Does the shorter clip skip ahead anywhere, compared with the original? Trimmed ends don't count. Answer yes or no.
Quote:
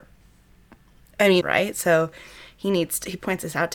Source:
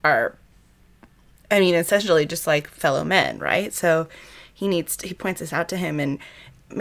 yes